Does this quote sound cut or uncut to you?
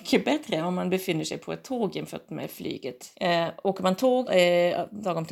cut